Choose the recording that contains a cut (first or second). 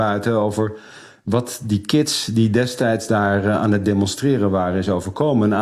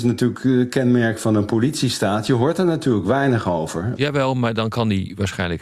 second